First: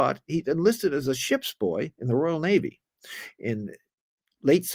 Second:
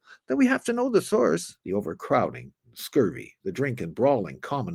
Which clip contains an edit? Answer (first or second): second